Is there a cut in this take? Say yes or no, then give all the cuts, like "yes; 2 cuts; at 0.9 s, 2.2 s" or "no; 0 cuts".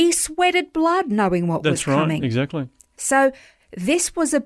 no; 0 cuts